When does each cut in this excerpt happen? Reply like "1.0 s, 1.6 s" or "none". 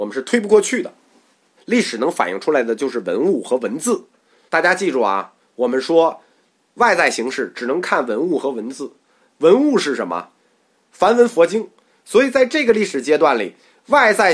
1.6 s, 4.5 s, 10.8 s